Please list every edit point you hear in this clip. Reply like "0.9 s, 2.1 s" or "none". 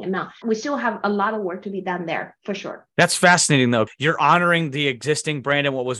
2.9 s

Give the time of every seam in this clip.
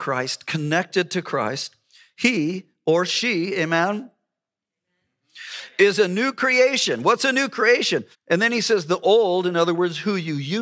8.1 s

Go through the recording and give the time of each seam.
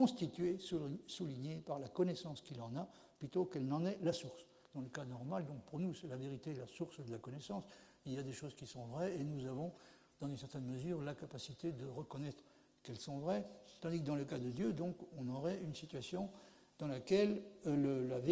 none

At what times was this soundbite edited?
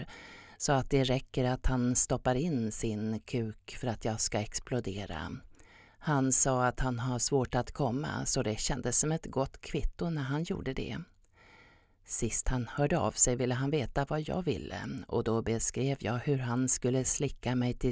5.9 s

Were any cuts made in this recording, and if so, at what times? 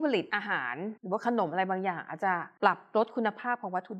1.0 s

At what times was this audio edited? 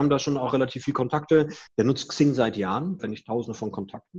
1.7 s, 3.0 s

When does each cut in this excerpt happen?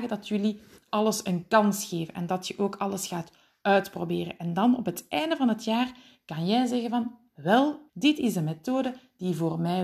7.9 s

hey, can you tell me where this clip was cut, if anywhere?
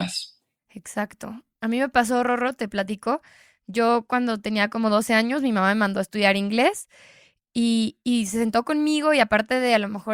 none

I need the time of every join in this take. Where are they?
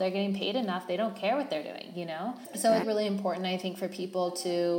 2.8 s

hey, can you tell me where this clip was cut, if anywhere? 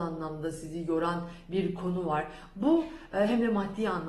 none

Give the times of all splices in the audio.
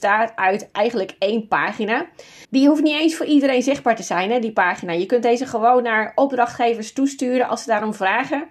2.4 s

